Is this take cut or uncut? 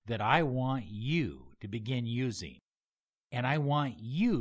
uncut